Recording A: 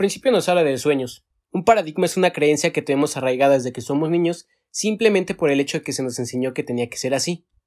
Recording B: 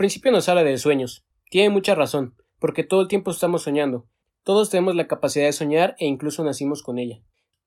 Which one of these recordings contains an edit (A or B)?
A